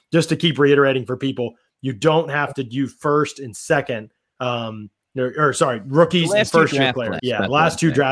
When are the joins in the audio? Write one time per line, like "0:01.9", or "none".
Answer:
0:07.2